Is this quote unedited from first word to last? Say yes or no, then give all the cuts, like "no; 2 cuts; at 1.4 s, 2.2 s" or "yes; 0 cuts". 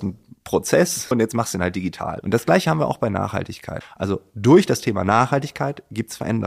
no; 3 cuts; at 1.1 s, 2.2 s, 3.8 s